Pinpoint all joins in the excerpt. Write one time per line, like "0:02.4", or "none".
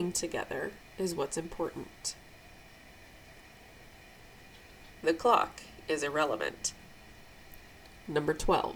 0:05.0